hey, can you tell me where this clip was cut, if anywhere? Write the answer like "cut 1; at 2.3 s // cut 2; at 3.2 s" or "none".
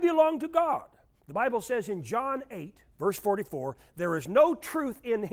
cut 1; at 2.9 s